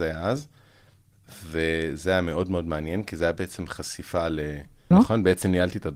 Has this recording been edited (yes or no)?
yes